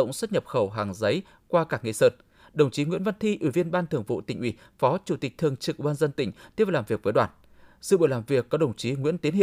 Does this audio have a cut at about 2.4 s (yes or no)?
no